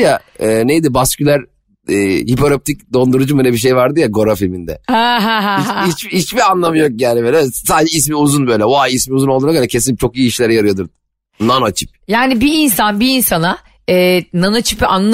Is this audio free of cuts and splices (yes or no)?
yes